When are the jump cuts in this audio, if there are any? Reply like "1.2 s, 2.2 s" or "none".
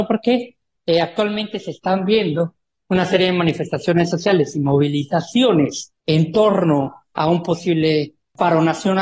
6.0 s